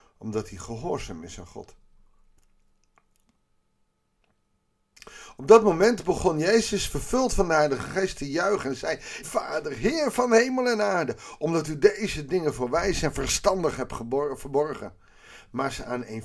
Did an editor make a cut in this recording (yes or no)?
yes